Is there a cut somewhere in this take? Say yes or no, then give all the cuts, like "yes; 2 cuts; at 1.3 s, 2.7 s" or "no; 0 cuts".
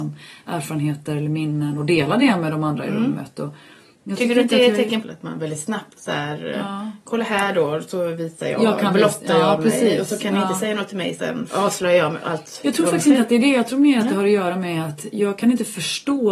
yes; 2 cuts; at 5.0 s, 11.5 s